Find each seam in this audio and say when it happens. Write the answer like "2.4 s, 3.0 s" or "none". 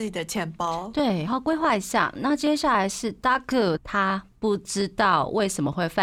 1.3 s, 3.8 s